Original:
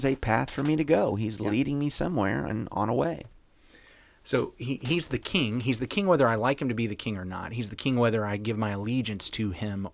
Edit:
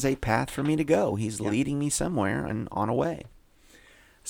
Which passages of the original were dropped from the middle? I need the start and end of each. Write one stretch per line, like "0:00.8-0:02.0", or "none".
none